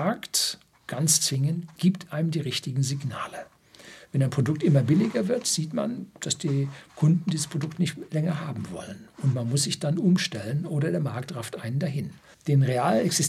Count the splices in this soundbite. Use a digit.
1